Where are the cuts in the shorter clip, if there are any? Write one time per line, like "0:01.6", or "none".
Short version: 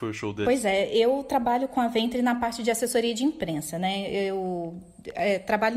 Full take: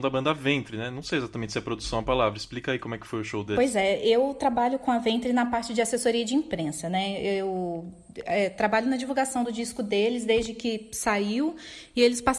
none